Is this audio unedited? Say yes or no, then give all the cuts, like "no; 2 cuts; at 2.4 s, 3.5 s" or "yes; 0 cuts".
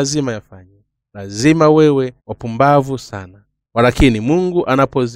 no; 1 cut; at 2.2 s